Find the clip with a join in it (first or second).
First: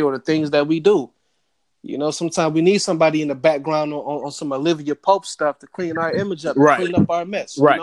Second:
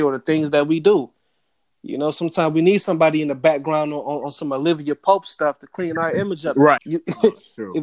second